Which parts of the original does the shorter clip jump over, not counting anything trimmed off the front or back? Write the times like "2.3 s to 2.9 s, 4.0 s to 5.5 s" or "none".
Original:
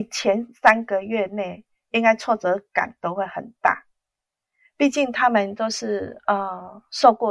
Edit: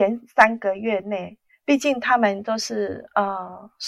1.8 s to 4.6 s